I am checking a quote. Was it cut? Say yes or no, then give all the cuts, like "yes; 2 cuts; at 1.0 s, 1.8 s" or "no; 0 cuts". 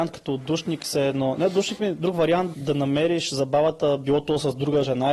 yes; 1 cut; at 2.5 s